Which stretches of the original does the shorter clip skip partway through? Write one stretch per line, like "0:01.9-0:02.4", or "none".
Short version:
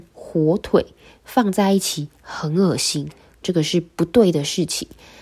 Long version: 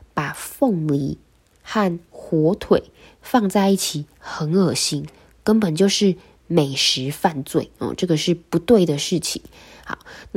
0:05.4-0:08.0

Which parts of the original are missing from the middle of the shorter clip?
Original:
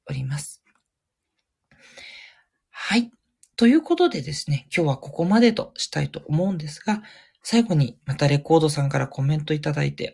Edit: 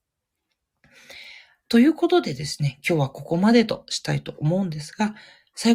0:02.5-0:03.5

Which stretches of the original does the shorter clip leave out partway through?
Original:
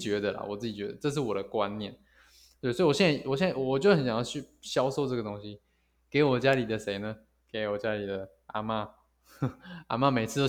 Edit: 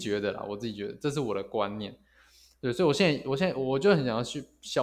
none

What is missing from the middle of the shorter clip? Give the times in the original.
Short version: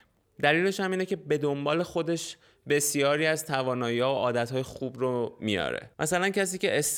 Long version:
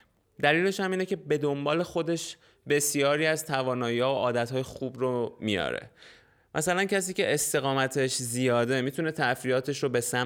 0:05.9-0:06.5

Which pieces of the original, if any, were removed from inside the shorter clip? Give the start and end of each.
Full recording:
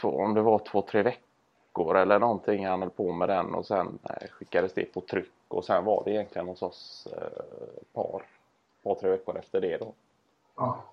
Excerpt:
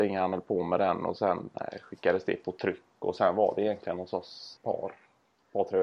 0:07.1-0:07.9

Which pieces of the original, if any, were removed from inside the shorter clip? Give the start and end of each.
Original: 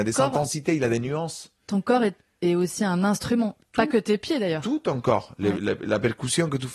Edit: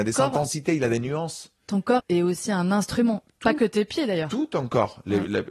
0:02.0-0:02.3

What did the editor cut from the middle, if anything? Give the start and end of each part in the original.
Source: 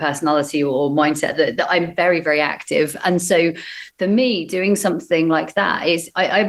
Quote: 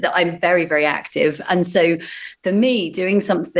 none

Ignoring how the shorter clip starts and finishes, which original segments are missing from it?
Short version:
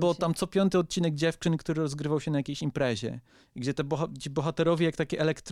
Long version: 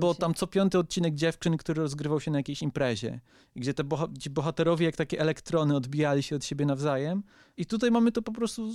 none

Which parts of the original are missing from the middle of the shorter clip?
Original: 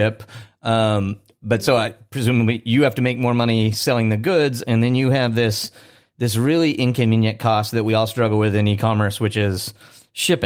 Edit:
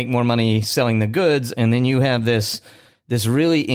none

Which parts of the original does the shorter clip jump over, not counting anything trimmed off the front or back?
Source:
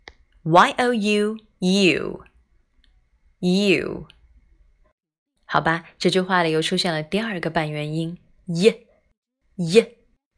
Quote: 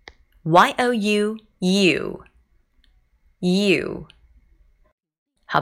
none

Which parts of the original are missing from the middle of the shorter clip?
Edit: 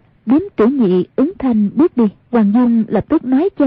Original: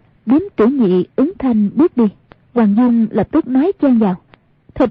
0:02.2-0:02.4

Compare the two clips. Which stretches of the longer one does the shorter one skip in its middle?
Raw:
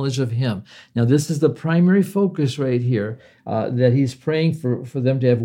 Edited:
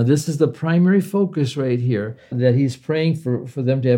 0:03.3-0:03.7

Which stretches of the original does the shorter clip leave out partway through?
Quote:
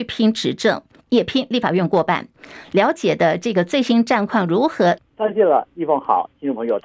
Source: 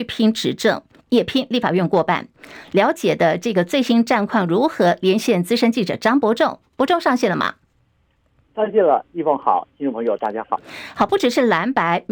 0:05.0-0:08.4

